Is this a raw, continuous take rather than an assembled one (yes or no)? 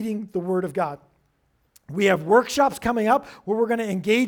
yes